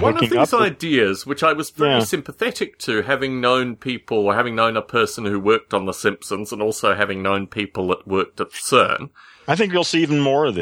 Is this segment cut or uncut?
uncut